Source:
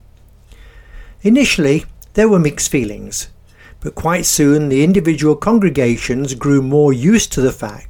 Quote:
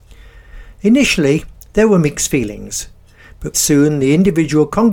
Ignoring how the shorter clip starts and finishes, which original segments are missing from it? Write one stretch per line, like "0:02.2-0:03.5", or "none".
0:03.9-0:04.2